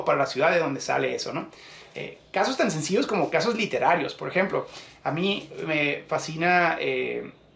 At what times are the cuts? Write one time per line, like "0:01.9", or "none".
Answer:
none